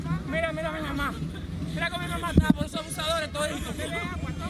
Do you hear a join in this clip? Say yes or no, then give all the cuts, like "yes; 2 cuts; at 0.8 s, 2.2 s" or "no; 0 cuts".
no; 0 cuts